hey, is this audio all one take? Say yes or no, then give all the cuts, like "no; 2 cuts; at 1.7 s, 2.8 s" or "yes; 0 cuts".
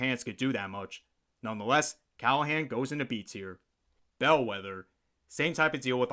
yes; 0 cuts